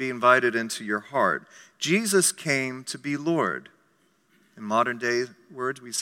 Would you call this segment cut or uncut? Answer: uncut